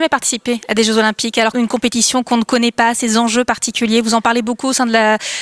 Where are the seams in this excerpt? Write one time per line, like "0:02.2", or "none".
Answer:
0:01.5